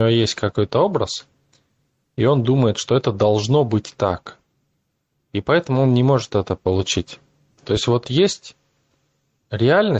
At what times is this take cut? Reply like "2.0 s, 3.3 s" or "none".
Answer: 5.1 s, 7.6 s

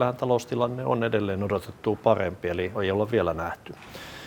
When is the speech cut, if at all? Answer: 2.7 s

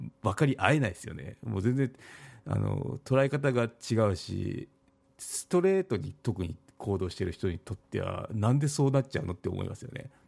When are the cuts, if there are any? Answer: none

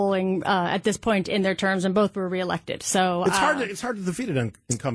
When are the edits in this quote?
none

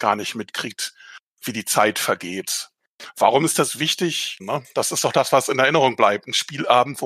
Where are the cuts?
4.4 s

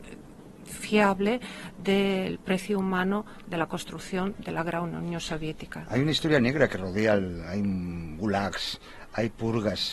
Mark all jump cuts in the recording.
7.5 s

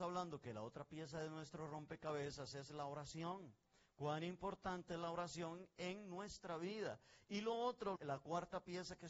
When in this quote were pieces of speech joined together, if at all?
8.0 s

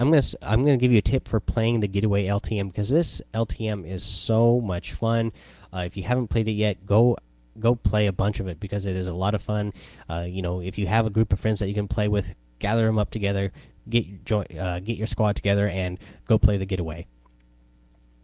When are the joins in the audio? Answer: none

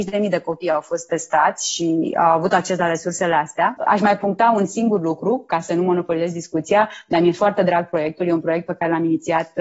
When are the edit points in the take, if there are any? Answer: 3.8 s

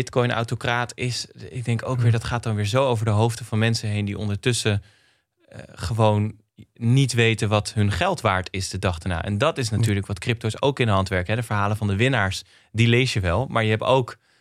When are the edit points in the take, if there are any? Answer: none

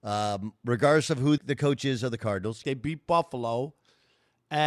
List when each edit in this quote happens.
1.4 s, 2.6 s

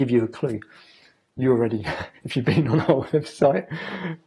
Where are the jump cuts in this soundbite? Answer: none

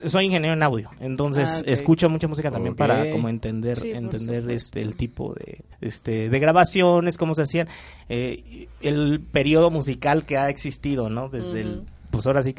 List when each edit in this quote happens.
5.7 s

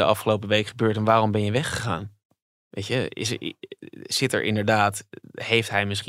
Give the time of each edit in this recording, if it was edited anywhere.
none

